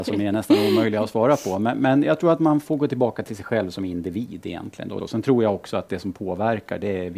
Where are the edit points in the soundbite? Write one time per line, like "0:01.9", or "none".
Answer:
0:05.0